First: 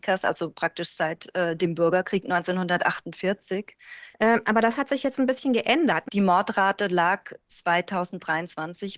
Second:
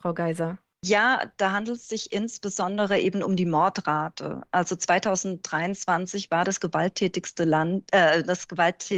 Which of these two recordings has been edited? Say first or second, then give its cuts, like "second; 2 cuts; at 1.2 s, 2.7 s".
first; 2 cuts; at 4.1 s, 6.1 s